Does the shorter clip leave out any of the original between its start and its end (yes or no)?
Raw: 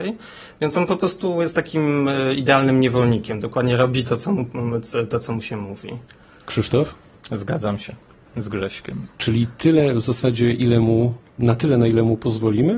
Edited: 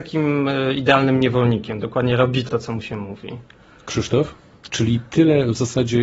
yes